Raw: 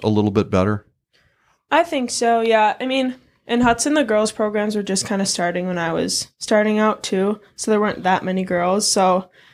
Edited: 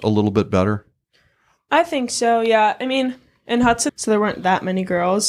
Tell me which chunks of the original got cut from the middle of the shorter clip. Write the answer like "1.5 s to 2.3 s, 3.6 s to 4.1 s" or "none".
3.9 s to 7.5 s